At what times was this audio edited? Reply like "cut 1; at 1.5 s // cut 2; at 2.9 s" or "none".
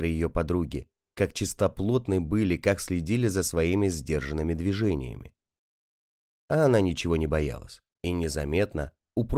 cut 1; at 7.9 s